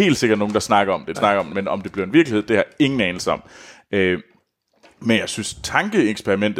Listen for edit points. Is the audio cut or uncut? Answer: cut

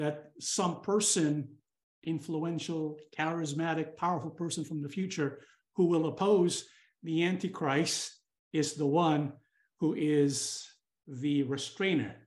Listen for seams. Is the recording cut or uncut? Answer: uncut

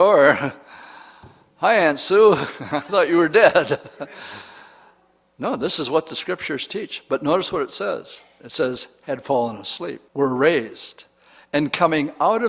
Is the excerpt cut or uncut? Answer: cut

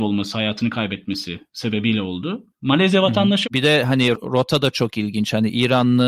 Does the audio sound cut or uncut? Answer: cut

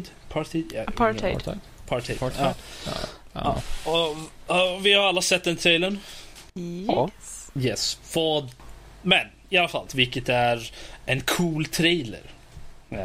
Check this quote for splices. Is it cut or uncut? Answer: cut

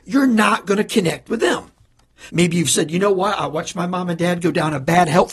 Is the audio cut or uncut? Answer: cut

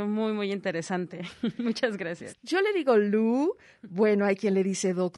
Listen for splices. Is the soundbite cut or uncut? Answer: cut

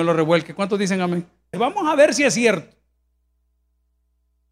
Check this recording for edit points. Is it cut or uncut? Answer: cut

